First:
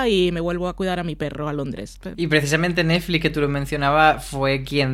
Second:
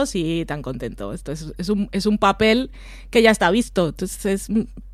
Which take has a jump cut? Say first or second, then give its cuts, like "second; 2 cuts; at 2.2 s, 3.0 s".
first; 1 cut; at 2.1 s